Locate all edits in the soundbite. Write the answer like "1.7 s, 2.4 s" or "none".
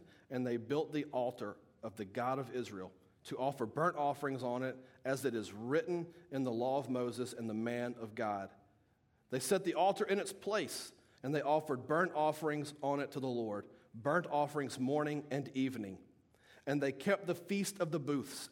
11.2 s